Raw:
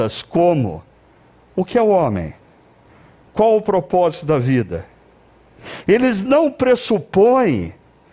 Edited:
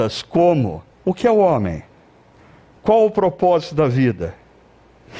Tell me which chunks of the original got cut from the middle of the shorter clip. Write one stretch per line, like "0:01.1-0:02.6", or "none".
0:00.9-0:01.4

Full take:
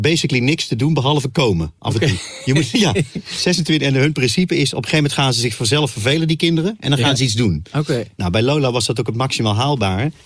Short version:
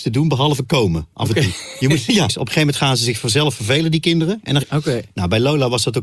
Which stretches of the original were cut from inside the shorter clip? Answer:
0:02.9-0:04.7
0:07.0-0:07.6

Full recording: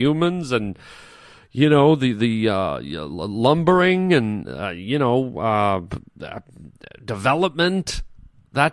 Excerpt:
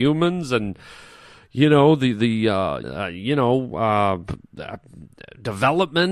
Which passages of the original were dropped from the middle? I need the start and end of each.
0:02.8-0:04.4

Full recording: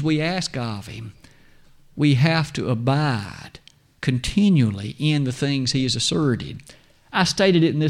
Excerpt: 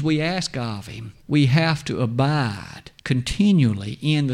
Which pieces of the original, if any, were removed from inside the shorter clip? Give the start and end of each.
0:01.2-0:01.9
0:03.7-0:04.0

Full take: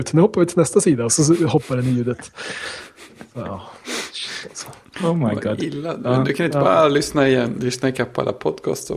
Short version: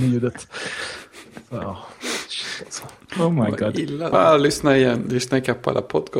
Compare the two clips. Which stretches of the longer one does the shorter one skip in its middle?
0:06.0-0:06.6

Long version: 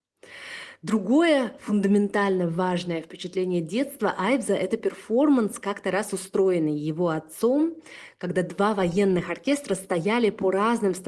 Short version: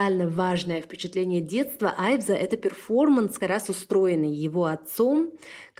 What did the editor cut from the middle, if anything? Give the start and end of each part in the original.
0:05.6-0:05.8

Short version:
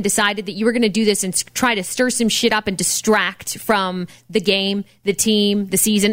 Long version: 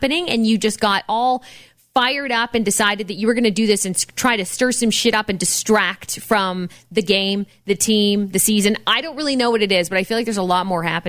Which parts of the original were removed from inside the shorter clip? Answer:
none

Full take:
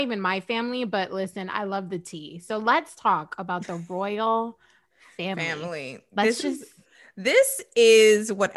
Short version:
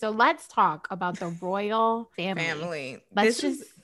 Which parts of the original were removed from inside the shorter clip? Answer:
0:04.6-0:05.1

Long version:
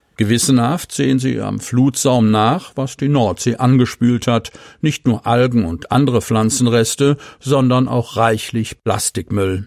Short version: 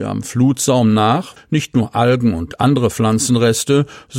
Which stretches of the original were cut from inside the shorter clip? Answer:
0:02.7-0:04.7

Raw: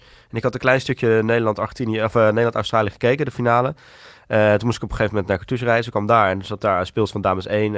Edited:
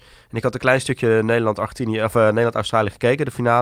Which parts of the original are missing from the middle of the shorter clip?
none

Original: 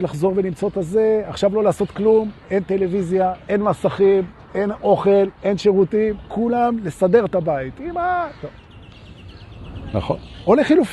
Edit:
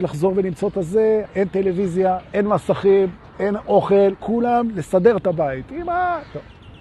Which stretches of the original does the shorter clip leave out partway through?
0:01.3-0:02.4
0:05.3-0:06.3

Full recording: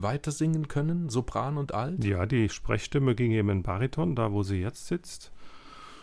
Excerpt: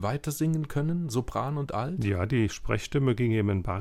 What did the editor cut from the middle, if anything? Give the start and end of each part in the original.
none

